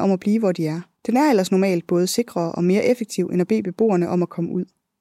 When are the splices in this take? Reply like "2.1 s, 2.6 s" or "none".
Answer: 1.0 s